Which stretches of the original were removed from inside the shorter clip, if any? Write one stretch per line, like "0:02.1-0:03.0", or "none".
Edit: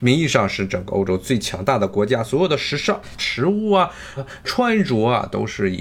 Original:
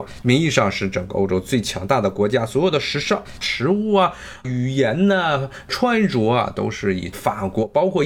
0:04.4-0:05.4